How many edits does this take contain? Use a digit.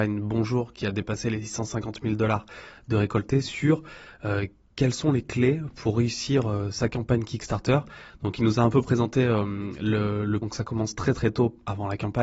1